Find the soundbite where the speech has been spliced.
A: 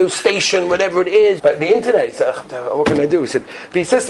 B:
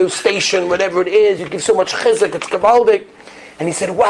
A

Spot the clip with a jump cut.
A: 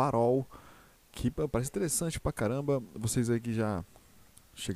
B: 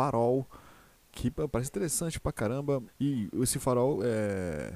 B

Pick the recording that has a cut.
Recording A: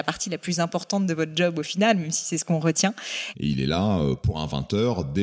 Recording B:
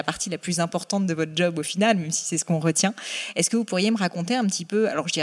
A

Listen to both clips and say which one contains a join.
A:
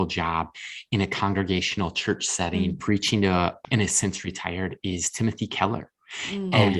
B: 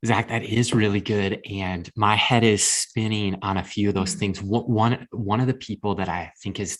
A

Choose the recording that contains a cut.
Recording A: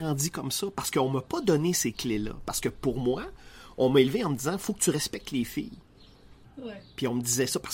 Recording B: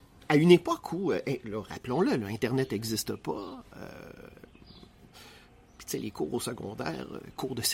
A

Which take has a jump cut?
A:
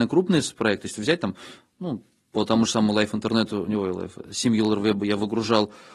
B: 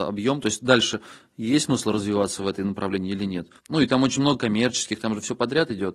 B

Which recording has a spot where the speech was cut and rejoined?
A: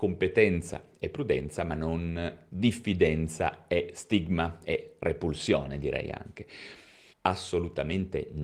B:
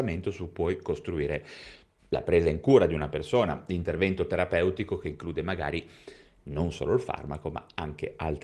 A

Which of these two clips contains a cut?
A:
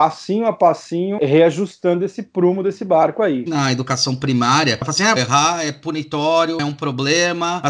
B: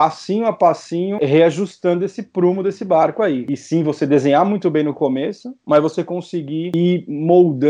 A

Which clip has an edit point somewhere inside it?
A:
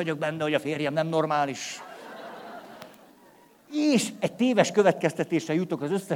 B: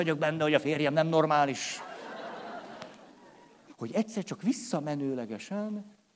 B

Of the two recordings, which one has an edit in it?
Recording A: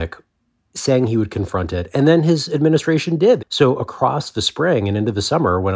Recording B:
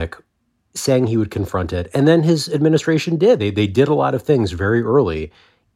A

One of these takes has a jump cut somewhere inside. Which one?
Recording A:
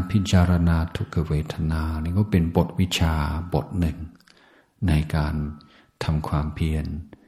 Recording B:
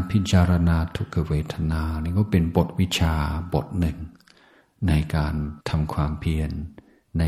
B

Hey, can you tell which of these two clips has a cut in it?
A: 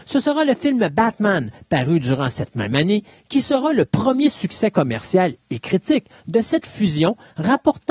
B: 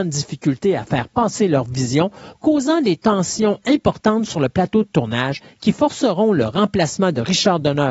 B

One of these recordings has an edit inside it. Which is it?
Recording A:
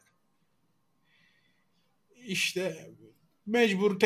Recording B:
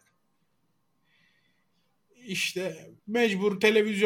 B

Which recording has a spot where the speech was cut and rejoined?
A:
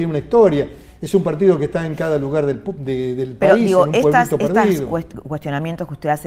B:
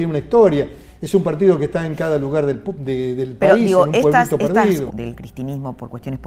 B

